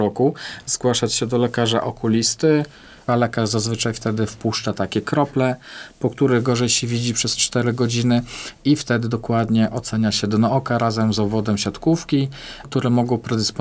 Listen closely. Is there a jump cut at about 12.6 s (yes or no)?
yes